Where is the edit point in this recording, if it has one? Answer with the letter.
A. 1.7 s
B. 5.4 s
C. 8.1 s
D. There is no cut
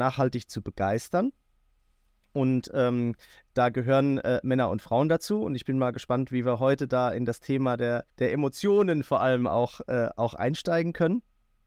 C